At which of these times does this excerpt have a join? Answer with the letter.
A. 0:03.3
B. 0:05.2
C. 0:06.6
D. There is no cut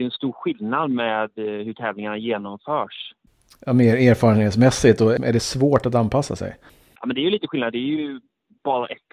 B